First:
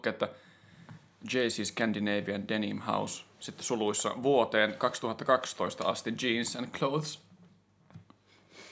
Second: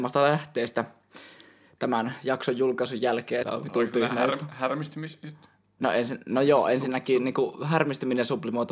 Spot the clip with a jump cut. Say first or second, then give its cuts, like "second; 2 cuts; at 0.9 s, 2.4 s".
second; 1 cut; at 3.4 s